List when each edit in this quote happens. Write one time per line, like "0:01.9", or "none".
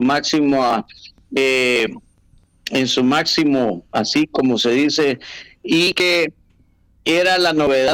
none